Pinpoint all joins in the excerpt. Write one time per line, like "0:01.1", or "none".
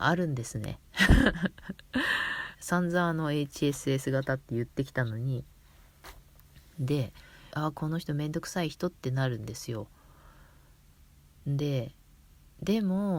0:02.5
0:07.5